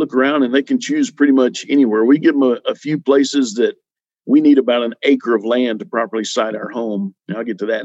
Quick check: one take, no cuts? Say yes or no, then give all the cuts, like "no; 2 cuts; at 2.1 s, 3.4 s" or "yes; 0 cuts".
yes; 0 cuts